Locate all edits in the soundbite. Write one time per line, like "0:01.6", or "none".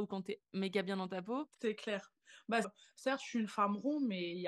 0:01.5
0:02.6